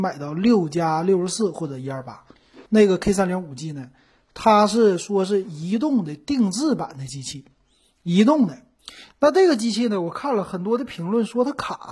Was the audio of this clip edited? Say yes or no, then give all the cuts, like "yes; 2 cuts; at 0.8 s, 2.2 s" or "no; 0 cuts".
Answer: yes; 1 cut; at 2.6 s